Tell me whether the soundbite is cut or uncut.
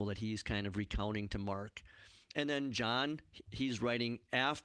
uncut